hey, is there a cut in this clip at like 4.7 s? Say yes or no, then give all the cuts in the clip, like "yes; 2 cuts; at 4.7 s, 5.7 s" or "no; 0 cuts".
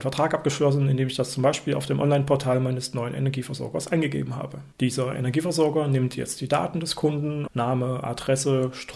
yes; 2 cuts; at 4.7 s, 7.5 s